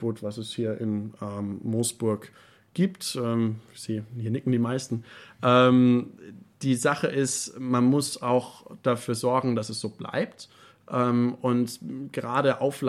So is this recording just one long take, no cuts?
yes; 0 cuts

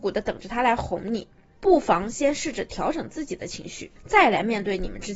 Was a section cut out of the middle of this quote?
yes; 2 cuts; at 1.6 s, 4.0 s

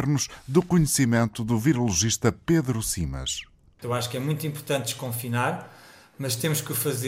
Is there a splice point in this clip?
yes; 2 cuts; at 3.8 s, 6.1 s

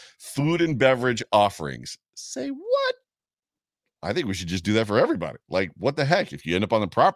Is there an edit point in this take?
no; 0 cuts

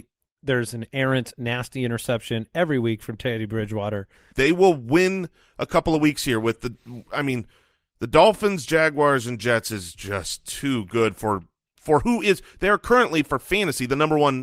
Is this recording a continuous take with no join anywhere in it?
no; 1 cut; at 4.3 s

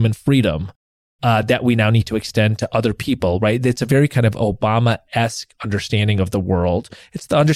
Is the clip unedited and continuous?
yes; 0 cuts

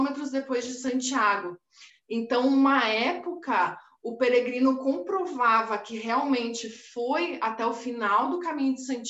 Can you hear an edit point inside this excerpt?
yes; 1 cut; at 1.9 s

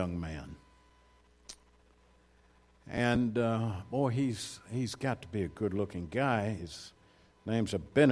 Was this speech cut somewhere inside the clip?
no; 0 cuts

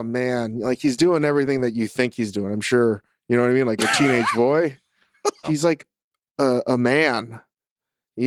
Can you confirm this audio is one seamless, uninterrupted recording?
no; 1 cut; at 5.4 s

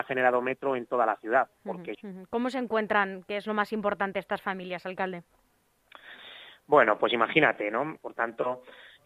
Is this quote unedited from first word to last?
no; 2 cuts; at 1.9 s, 8.0 s

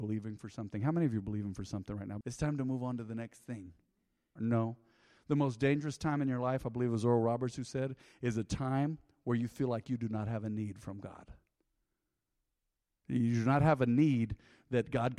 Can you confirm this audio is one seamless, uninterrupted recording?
no; 2 cuts; at 2.2 s, 4.4 s

